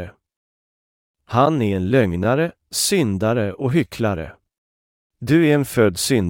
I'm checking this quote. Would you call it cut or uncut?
cut